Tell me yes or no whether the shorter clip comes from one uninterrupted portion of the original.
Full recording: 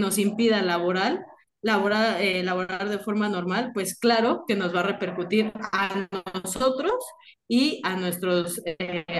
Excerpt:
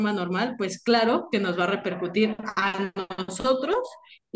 yes